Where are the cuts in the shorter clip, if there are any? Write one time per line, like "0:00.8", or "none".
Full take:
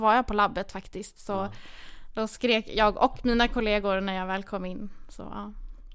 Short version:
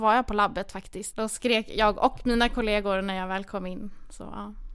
0:01.1